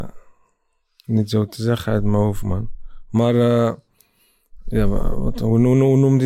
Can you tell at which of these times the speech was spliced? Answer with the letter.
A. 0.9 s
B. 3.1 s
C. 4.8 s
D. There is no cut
D